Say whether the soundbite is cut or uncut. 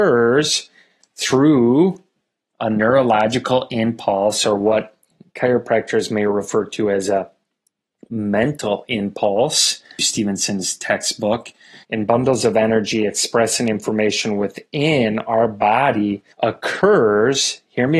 cut